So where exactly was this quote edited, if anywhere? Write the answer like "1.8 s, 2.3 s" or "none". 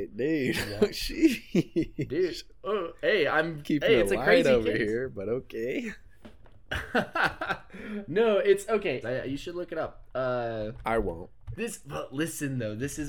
9.0 s, 11.5 s